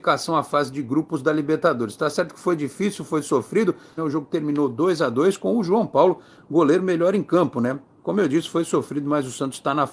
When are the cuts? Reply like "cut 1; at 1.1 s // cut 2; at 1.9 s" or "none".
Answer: cut 1; at 4.0 s